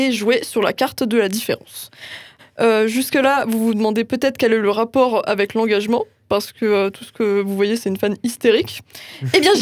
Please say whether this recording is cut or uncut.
cut